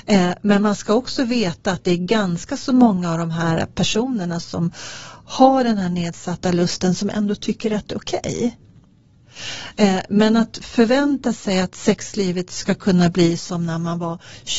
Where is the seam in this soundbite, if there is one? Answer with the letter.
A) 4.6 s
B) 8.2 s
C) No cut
C